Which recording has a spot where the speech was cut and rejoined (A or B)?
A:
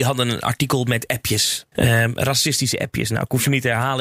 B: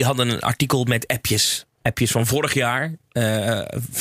A